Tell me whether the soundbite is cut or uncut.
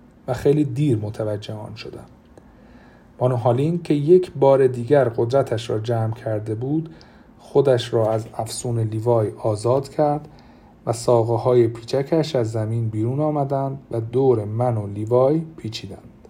uncut